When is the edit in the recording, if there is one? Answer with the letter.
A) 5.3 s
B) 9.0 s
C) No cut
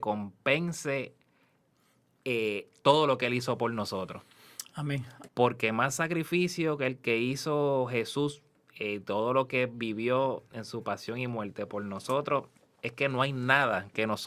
A